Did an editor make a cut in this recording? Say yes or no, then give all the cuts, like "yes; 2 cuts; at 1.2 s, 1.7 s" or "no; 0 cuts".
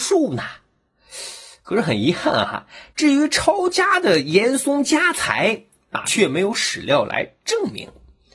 yes; 1 cut; at 6.0 s